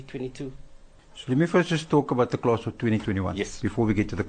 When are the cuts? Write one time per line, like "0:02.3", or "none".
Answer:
none